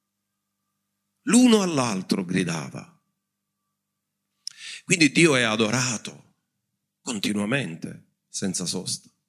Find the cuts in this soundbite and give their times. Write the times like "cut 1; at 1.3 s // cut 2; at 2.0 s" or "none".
none